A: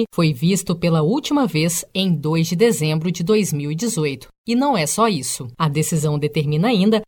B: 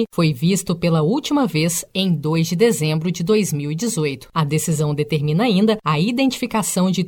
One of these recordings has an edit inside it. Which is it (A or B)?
B